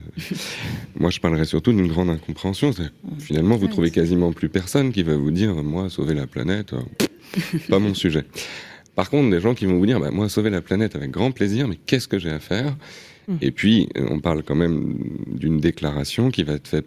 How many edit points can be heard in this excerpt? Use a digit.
0